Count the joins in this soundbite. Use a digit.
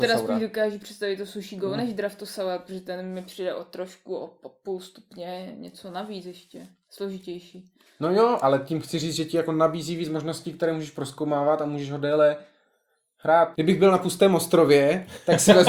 1